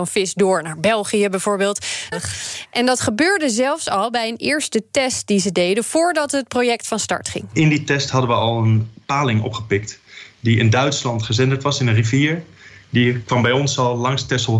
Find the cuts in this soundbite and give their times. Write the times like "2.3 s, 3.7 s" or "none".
2.1 s